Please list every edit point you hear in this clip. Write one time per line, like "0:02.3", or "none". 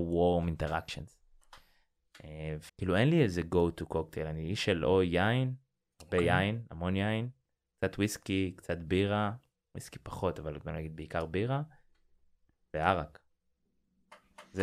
0:02.7

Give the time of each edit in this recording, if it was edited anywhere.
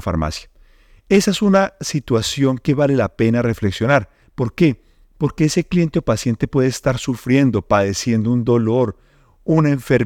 none

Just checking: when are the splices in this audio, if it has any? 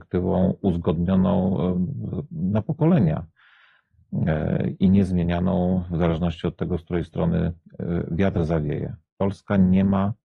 none

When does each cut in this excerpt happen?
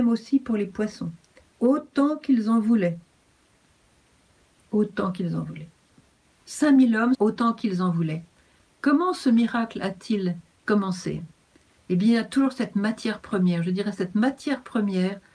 0:07.1

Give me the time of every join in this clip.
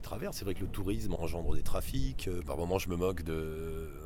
0:01.2
0:02.4

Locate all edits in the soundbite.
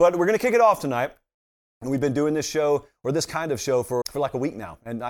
0:04.0

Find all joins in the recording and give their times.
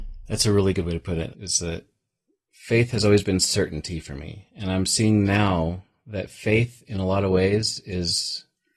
0:01.3

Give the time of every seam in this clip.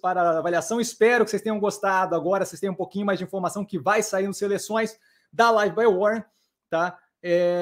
none

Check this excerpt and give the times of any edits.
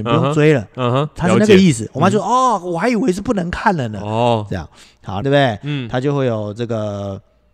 0:05.2

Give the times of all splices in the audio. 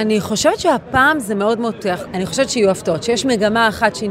0:02.1

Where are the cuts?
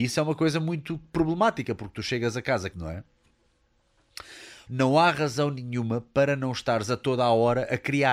0:02.7
0:04.7

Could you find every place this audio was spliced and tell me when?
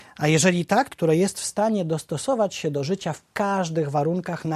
0:00.9

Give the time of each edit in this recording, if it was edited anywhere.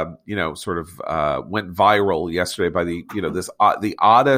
none

